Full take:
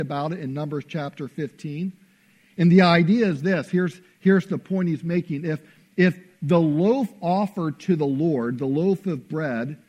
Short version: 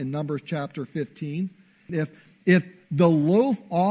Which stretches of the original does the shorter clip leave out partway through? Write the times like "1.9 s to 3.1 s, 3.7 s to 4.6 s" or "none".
2.3 s to 5.4 s